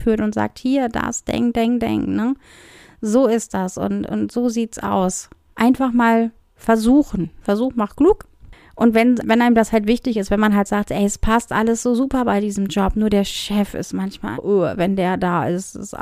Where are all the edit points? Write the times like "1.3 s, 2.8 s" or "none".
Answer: 9.2 s, 14.3 s